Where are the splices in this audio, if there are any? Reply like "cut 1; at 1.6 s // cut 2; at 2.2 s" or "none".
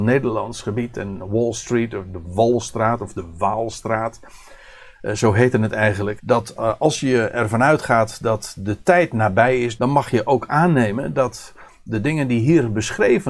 cut 1; at 6.2 s // cut 2; at 9.8 s